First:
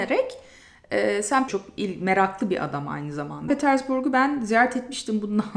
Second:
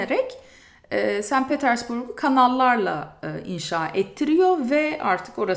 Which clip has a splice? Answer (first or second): first